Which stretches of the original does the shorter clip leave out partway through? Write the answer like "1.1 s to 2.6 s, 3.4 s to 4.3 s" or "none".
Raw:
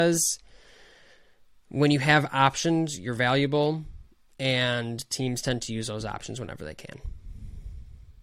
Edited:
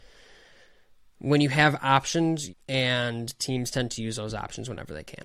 3.0 s to 4.2 s